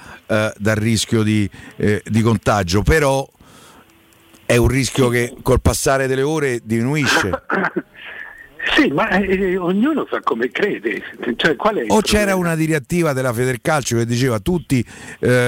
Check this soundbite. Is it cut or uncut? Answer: uncut